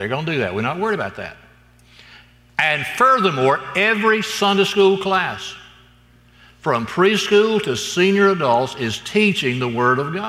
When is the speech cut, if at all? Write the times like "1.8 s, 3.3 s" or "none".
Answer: none